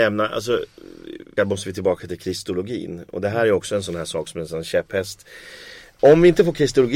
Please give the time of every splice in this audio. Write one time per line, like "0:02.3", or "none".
0:01.4